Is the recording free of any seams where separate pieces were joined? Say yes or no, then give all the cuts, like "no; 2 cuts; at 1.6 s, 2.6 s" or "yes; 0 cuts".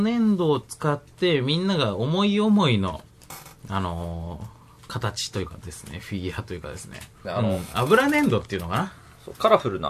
no; 1 cut; at 7.2 s